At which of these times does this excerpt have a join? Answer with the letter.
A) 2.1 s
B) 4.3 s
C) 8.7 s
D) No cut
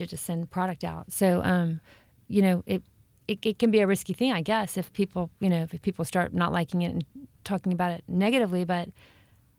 D